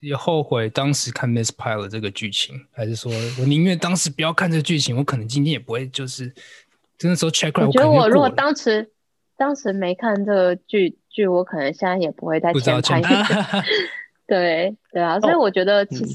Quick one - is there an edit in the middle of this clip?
yes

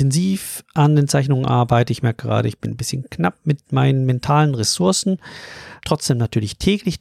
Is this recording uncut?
no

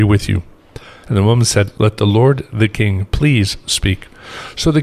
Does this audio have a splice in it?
yes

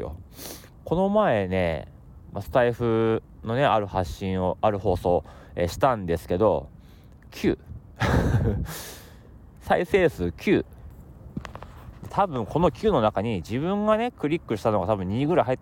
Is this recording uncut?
yes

